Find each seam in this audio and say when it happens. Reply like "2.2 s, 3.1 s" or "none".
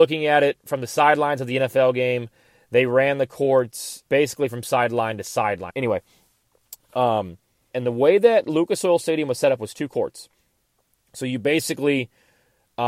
4.1 s, 5.7 s, 7.7 s